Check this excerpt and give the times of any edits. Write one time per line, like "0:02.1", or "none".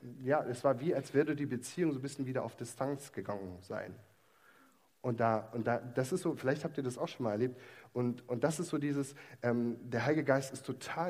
none